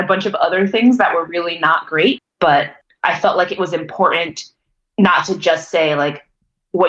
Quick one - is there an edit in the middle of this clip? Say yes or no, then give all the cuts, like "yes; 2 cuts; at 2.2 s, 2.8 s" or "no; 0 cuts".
yes; 1 cut; at 2.2 s